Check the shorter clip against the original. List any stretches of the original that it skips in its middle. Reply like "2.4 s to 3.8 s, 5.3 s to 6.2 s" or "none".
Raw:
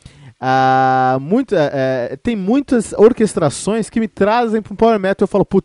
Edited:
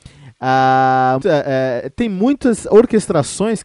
1.2 s to 1.5 s